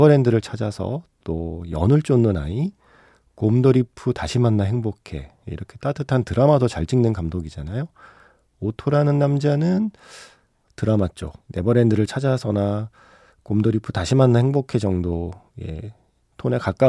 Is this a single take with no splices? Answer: no; 1 cut; at 11.4 s

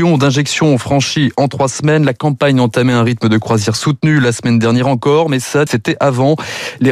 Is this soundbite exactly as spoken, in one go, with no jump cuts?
no; 1 cut; at 5.7 s

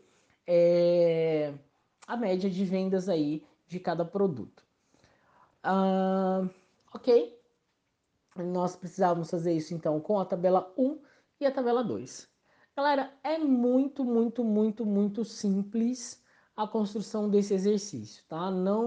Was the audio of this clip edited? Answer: no; 0 cuts

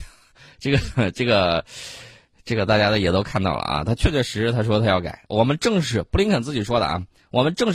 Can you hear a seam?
no; 0 cuts

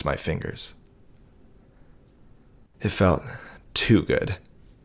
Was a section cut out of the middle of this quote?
yes; 1 cut; at 2.7 s

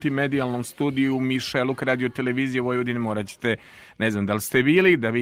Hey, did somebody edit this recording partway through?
no; 0 cuts

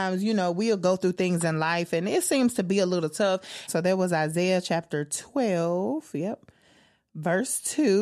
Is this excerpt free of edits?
no; 1 cut; at 3.7 s

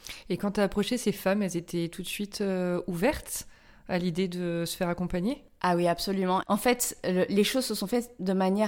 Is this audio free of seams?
no; 1 cut; at 6.4 s

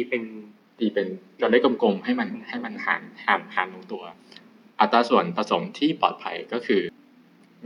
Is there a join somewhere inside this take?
no; 0 cuts

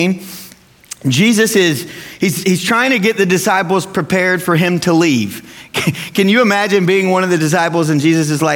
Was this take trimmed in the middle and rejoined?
no; 0 cuts

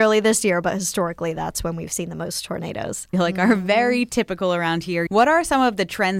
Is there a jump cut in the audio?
yes; 2 cuts; at 3.1 s, 5.1 s

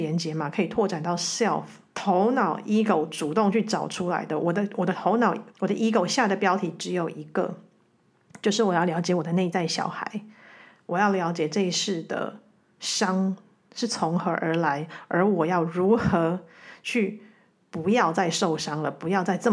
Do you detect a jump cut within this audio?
yes; 2 cuts; at 1.9 s, 5.5 s

